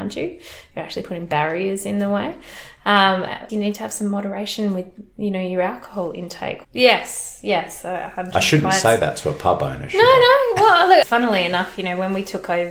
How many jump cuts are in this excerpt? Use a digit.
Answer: 3